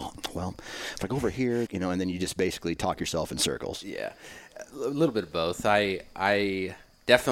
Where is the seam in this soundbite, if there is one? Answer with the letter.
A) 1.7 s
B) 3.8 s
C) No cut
A